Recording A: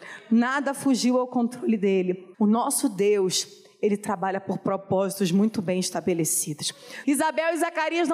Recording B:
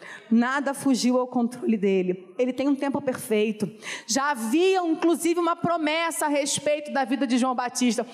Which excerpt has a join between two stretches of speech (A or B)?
A